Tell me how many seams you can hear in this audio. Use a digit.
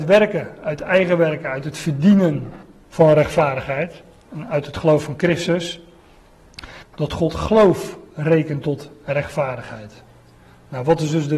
2